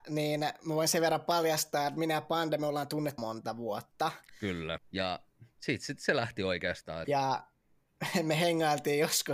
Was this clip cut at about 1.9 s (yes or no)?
no